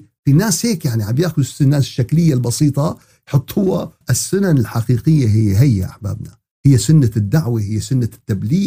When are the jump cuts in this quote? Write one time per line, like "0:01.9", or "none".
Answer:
0:04.0